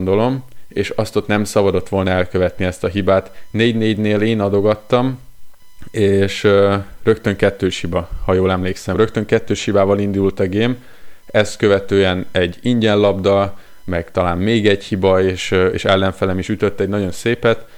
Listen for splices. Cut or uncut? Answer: uncut